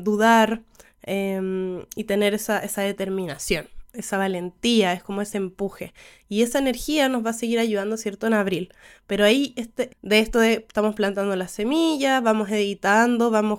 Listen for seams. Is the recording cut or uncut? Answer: cut